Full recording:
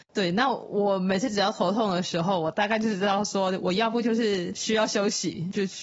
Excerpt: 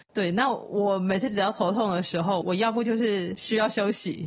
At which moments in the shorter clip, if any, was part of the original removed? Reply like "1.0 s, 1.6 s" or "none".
2.4 s